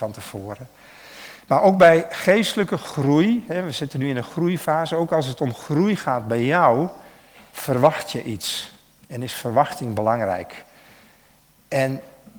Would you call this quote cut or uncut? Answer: uncut